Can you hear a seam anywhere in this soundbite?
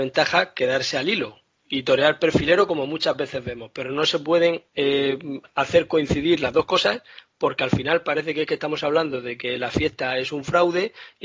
yes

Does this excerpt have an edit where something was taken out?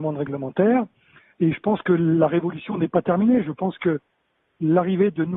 no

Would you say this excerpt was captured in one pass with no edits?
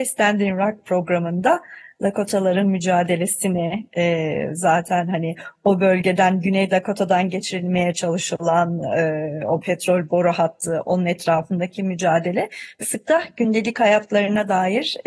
no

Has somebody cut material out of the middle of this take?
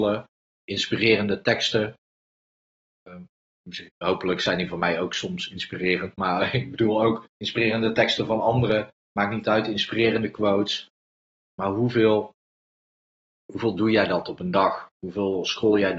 no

